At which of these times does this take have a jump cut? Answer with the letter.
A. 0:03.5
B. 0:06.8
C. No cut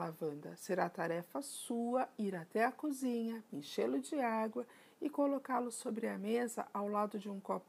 A